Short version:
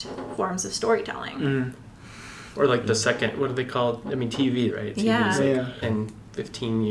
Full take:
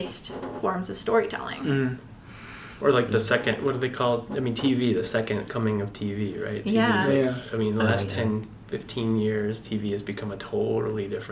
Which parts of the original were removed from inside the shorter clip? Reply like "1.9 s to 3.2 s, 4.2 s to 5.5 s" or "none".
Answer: 4.9 s to 6.4 s, 7.5 s to 8.2 s